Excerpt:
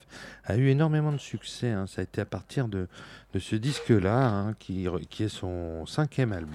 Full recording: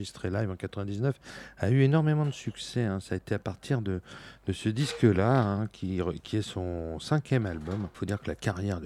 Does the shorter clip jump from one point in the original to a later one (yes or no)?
no